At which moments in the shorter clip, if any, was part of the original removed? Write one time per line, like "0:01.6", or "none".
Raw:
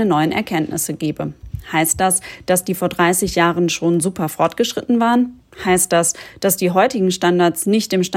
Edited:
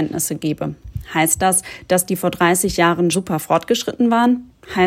0:03.1